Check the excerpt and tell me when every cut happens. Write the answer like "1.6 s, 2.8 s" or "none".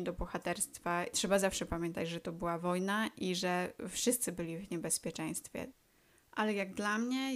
1.1 s

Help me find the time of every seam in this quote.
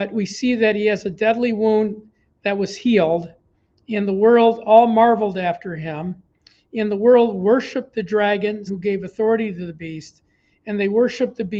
8.7 s

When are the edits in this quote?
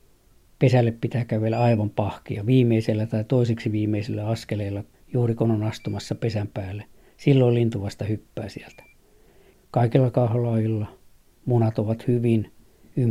9.5 s

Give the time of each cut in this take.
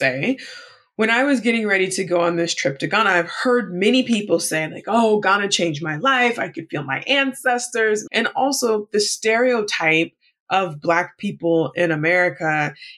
8.1 s

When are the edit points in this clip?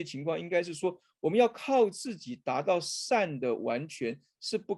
none

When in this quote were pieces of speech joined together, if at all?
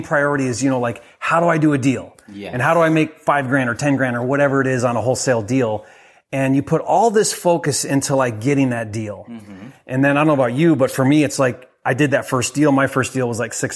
none

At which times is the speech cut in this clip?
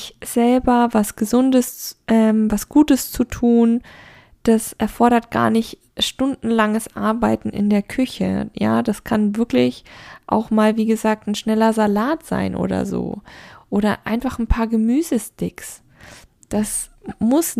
none

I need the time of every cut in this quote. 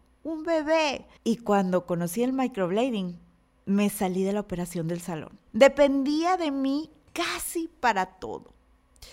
1.2 s, 5.5 s

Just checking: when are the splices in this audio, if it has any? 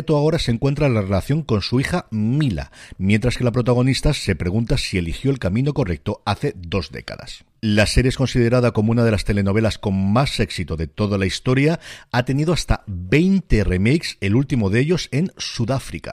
none

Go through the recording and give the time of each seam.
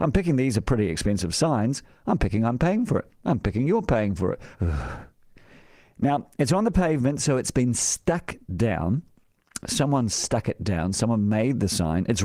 4.5 s

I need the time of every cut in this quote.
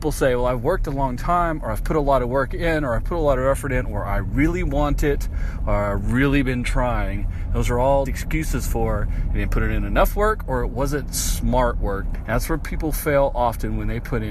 8.1 s, 12.2 s

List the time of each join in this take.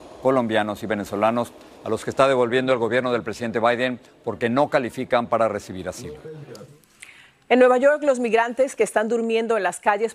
none

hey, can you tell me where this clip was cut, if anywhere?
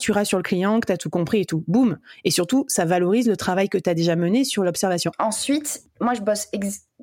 5.1 s

